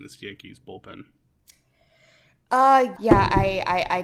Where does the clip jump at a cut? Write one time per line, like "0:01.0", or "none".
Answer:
0:03.0